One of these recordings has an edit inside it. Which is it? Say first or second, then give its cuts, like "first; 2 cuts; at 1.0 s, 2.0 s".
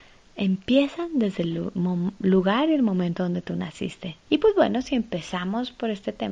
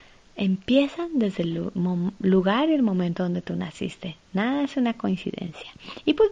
first; 1 cut; at 4.3 s